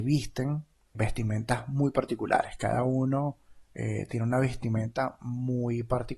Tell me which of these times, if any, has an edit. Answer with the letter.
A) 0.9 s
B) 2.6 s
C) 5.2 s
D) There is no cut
A